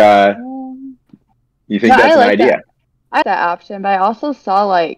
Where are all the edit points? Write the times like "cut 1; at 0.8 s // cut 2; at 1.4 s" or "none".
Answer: cut 1; at 3.2 s

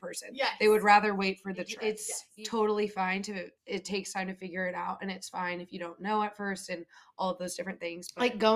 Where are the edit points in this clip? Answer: cut 1; at 3.6 s

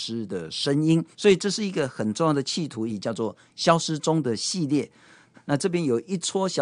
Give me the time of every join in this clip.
cut 1; at 1.1 s // cut 2; at 2.9 s // cut 3; at 5.3 s

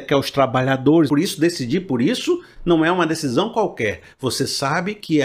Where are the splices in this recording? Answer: cut 1; at 1.1 s

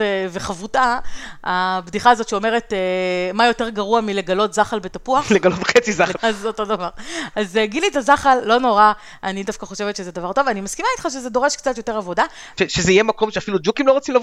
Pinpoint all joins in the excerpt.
cut 1; at 6.1 s // cut 2; at 12.6 s

